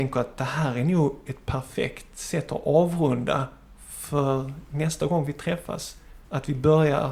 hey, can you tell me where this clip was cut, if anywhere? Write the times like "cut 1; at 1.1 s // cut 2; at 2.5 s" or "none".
none